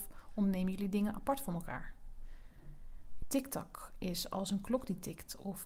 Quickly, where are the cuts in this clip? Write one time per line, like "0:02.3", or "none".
0:03.2